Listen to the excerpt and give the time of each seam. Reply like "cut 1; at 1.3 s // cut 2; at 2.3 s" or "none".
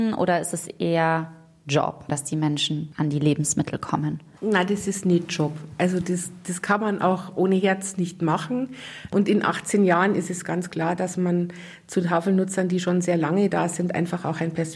cut 1; at 2.1 s